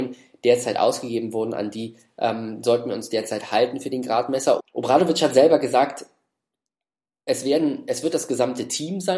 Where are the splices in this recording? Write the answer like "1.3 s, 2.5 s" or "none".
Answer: 4.6 s